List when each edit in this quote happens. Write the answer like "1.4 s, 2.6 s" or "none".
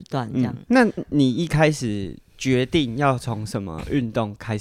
1.0 s